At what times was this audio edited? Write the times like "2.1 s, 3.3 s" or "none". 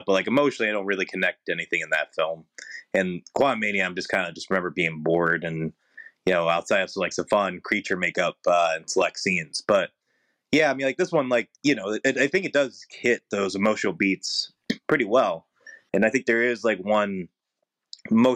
11.5 s